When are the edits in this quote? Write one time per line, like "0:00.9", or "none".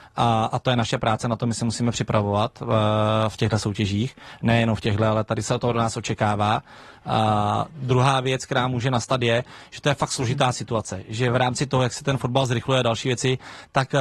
none